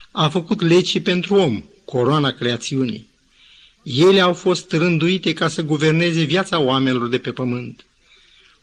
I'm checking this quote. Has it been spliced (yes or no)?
no